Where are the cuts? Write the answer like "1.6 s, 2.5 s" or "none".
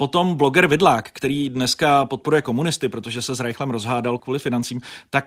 4.2 s